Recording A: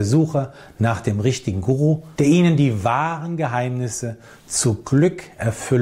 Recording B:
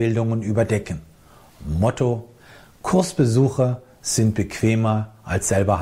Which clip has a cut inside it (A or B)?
A